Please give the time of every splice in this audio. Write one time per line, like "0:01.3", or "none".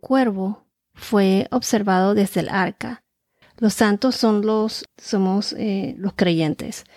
0:03.4
0:04.9